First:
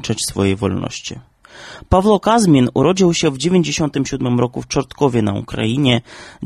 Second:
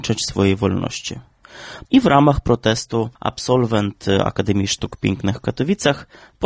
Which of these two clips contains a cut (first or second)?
second